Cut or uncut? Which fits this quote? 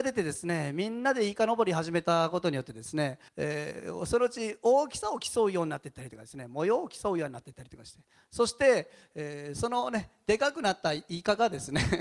cut